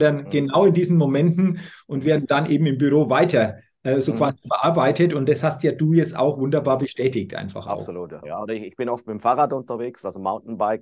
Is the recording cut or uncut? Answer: cut